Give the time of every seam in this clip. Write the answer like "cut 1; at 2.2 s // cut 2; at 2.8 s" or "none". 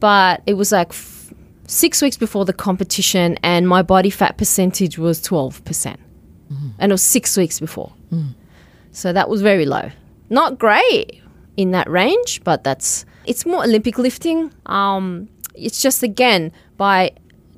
cut 1; at 11.5 s // cut 2; at 13.3 s // cut 3; at 14.6 s